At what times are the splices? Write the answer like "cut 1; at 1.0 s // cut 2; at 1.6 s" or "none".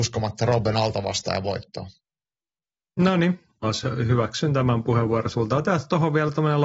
cut 1; at 3.6 s